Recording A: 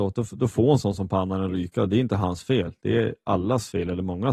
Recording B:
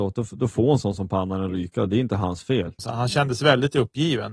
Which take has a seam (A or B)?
B